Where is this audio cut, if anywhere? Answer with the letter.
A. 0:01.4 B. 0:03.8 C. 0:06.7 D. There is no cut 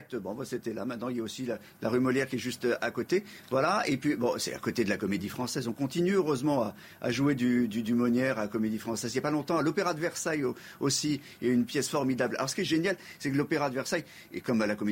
D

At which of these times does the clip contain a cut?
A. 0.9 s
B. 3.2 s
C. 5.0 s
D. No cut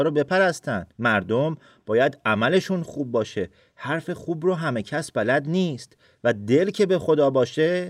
A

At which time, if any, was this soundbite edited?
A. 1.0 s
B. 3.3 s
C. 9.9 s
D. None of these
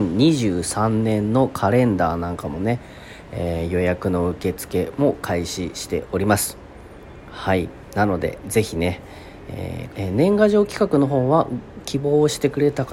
C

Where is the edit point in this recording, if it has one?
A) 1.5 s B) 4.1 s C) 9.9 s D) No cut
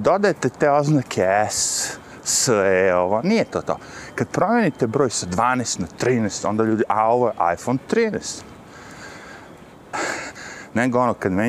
C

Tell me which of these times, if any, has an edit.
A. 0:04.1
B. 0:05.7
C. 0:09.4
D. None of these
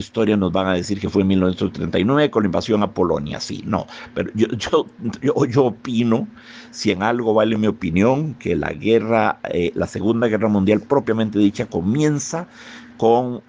D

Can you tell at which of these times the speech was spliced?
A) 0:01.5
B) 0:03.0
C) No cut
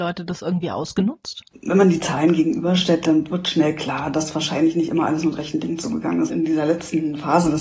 C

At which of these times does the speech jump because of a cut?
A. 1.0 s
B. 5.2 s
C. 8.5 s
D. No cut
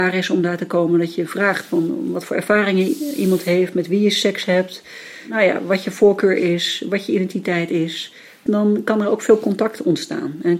C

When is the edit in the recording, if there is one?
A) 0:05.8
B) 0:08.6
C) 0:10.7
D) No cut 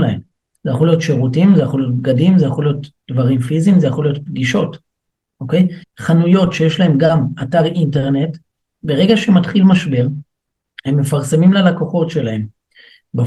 A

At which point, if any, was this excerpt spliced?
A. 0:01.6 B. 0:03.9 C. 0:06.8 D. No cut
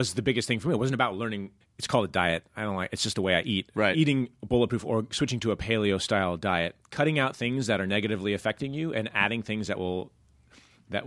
A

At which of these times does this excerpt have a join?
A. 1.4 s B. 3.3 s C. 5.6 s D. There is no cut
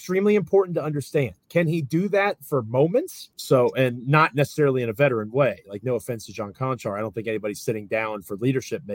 B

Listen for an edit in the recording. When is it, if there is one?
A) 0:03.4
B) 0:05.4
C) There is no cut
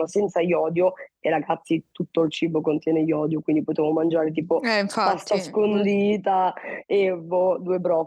C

